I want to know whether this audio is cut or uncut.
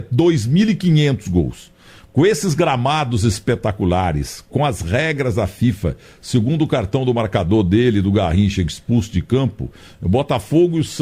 cut